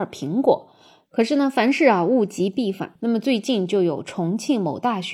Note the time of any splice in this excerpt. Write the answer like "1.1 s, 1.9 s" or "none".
1.0 s, 3.0 s